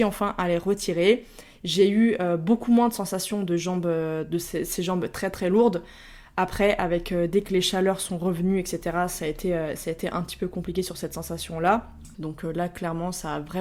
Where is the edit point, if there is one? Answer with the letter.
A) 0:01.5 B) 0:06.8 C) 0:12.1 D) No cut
C